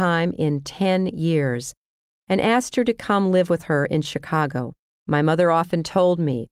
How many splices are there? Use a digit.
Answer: 1